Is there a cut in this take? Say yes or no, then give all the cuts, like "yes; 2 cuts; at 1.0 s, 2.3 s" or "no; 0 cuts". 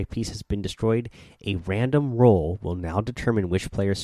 no; 0 cuts